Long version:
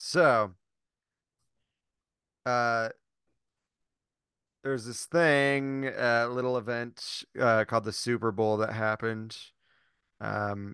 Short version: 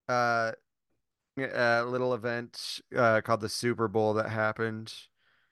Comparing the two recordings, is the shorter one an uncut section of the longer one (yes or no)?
no